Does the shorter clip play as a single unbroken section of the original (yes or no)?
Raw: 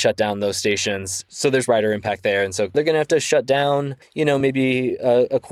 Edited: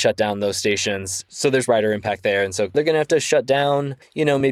yes